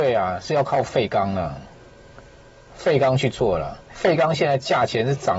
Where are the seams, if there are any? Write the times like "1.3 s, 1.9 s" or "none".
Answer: none